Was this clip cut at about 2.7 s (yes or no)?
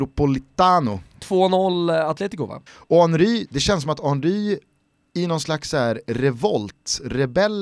yes